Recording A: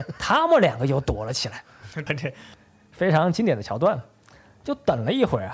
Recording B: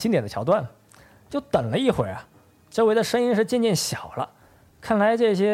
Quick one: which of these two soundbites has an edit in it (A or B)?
A